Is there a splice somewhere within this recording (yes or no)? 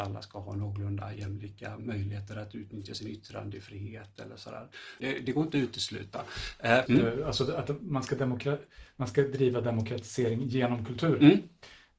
yes